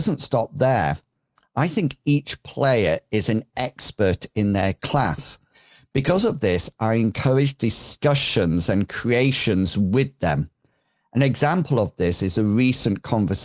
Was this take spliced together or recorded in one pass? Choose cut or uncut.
uncut